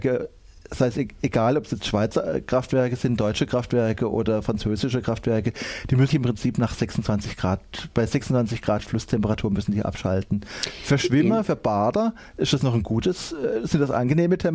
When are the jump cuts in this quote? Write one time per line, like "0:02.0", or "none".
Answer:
0:06.1